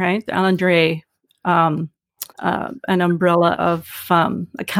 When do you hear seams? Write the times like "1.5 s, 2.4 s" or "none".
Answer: 2.3 s, 3.5 s